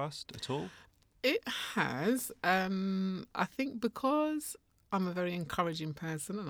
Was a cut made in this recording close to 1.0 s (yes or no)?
no